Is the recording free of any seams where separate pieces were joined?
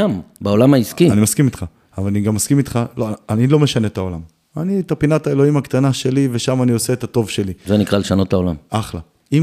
yes; 0 cuts

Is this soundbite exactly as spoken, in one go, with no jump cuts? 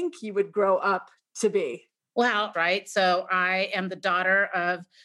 no; 1 cut; at 2.5 s

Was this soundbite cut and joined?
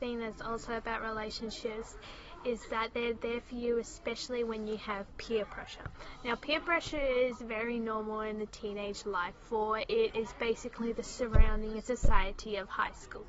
no; 0 cuts

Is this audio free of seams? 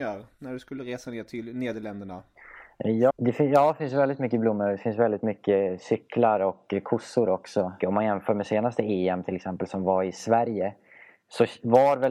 no; 2 cuts; at 3.1 s, 7.8 s

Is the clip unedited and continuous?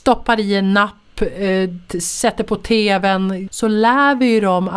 no; 1 cut; at 3.5 s

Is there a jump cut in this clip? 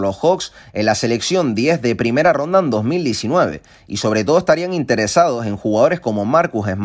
no; 0 cuts

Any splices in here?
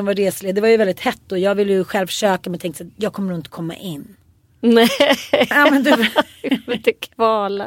no; 0 cuts

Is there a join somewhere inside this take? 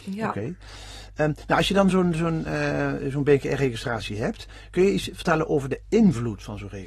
no; 0 cuts

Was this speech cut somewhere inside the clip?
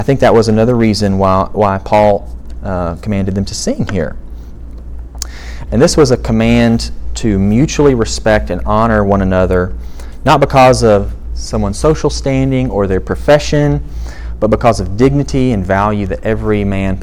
yes; 1 cut; at 5.7 s

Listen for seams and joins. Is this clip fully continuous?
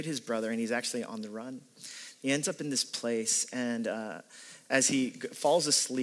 yes; 0 cuts

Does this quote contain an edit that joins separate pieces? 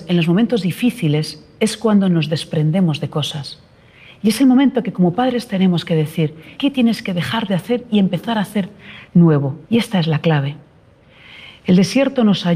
yes; 1 cut; at 9.6 s

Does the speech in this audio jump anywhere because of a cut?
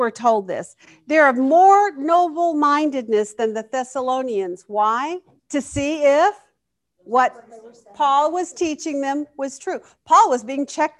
yes; 1 cut; at 5.4 s

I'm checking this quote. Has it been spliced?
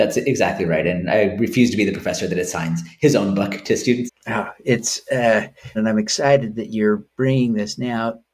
yes; 2 cuts; at 4.1 s, 5.7 s

